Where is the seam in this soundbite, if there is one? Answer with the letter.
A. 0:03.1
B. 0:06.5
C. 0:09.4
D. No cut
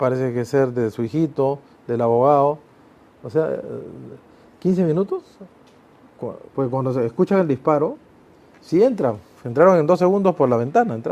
B